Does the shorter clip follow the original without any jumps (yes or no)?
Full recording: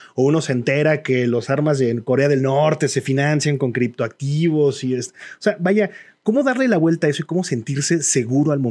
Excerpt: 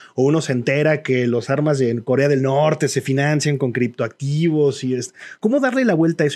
no